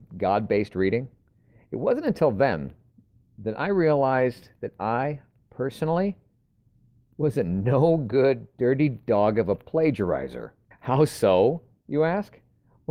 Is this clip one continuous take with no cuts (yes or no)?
no